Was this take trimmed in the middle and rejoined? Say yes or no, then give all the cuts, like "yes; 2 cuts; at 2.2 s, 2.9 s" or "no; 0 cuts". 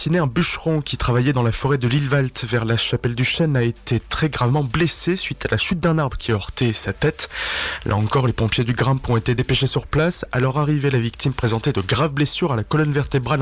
no; 0 cuts